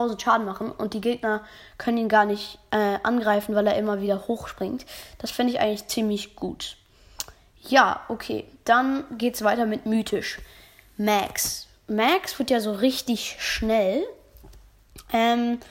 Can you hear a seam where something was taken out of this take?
no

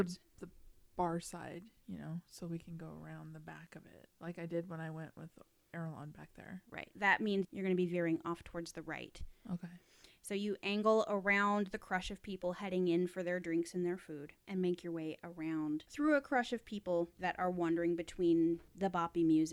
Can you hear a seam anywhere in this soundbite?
no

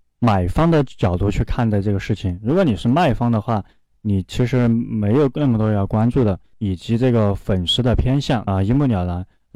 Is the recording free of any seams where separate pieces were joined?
no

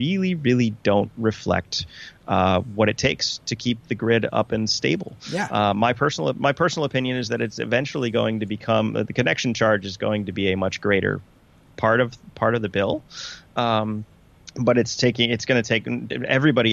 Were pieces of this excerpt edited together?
no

